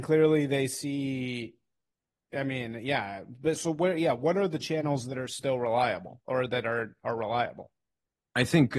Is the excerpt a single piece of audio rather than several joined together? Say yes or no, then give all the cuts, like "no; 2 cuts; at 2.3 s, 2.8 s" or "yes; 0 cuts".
no; 1 cut; at 3.5 s